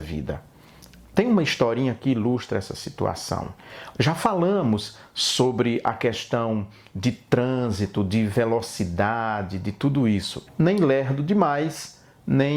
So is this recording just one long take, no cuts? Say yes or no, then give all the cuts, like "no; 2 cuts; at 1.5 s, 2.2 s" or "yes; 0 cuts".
no; 2 cuts; at 3.9 s, 10.5 s